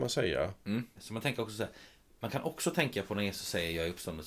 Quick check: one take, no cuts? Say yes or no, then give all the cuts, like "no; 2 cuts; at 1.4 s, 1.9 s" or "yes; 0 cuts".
no; 1 cut; at 1.0 s